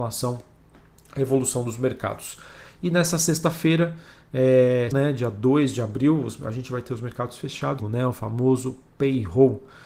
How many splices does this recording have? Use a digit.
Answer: 2